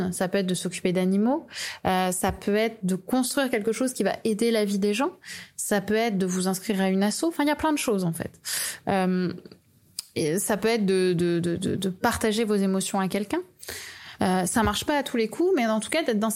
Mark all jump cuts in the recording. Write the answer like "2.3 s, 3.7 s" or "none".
14.2 s